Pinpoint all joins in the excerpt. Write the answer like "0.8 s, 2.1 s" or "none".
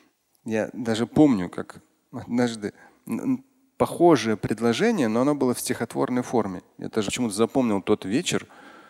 7.0 s